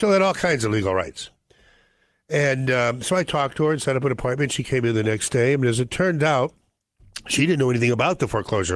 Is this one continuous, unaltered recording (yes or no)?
yes